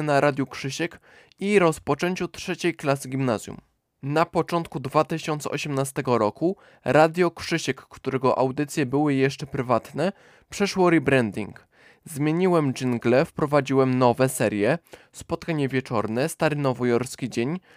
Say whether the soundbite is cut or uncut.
uncut